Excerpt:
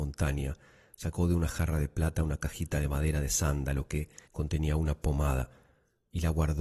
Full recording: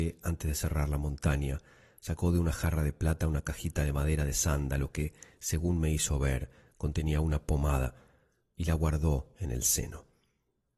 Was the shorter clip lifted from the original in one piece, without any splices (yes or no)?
no